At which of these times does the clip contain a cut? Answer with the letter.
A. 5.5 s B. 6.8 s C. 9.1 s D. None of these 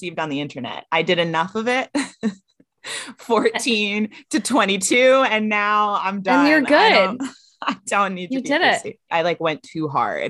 C